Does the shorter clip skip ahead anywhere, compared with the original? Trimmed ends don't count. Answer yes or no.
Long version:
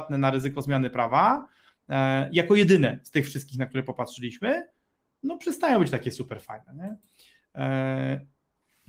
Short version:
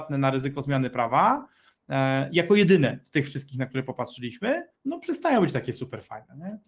yes